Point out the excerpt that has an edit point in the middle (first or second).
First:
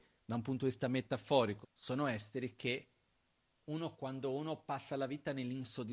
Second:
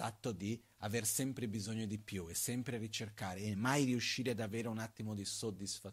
first